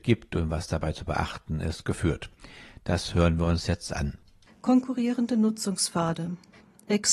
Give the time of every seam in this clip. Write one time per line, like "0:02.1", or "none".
0:04.5